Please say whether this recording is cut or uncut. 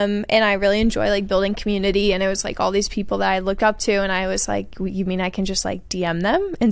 uncut